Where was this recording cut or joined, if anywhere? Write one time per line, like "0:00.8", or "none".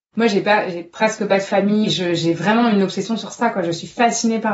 none